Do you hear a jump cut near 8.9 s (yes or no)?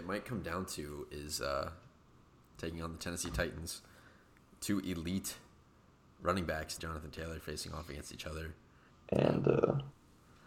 yes